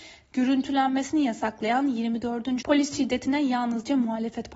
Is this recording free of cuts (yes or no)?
no